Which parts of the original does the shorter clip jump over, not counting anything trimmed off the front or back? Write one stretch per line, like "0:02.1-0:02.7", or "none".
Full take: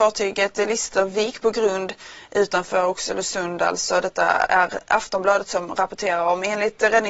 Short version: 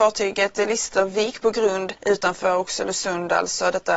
0:02.0-0:02.3